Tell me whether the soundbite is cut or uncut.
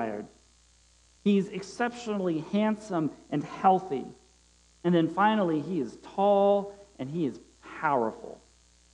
cut